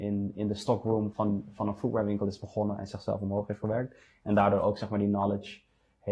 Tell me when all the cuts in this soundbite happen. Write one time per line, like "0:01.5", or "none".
0:01.1

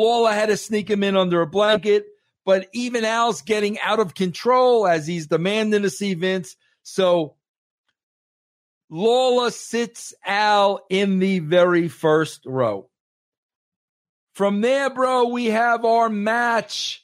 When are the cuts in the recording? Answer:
none

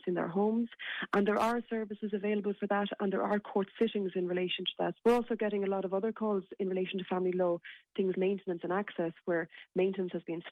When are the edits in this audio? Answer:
0:05.0
0:08.1

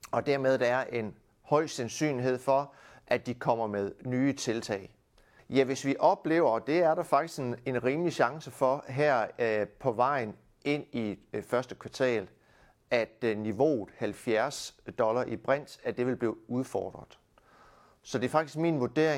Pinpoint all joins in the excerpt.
0:05.4

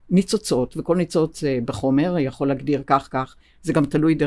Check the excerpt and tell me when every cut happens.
none

